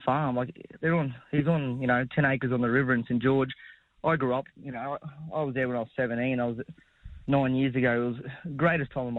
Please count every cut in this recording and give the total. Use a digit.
0